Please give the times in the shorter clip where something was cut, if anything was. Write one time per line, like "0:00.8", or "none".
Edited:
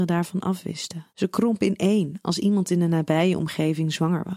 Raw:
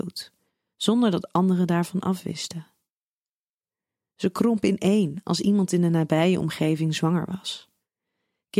0:01.1